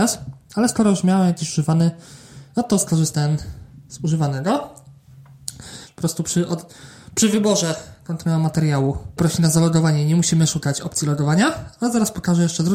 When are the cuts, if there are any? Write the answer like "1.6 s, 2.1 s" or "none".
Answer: 5.9 s